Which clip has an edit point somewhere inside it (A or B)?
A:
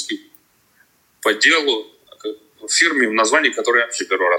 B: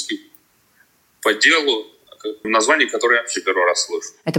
B